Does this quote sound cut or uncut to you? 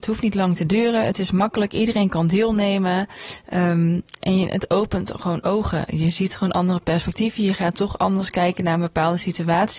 uncut